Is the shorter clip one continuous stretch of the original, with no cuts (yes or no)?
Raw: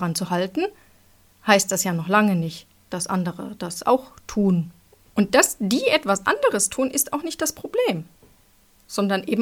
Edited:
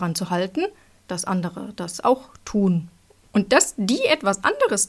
no